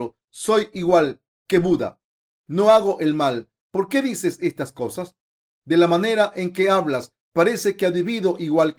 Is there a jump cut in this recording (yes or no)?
no